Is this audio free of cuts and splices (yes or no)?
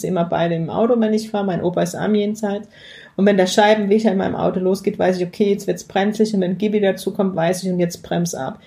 yes